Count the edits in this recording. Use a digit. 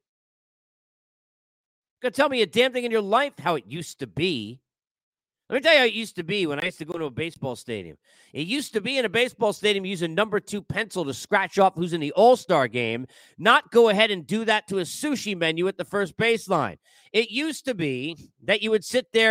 0